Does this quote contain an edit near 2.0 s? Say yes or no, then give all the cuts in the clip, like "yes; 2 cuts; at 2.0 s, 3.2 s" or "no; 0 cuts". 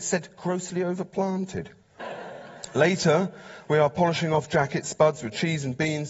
yes; 1 cut; at 2.0 s